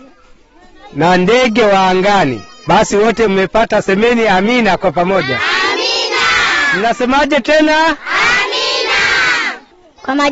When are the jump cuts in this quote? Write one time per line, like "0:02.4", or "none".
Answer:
0:02.7

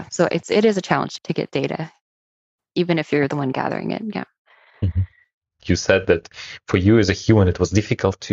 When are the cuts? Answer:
0:05.5

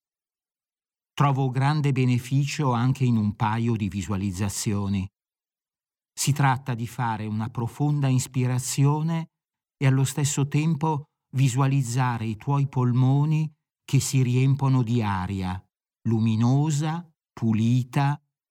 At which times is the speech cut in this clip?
0:06.0

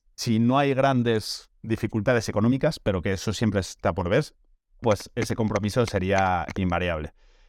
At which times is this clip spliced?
0:04.8

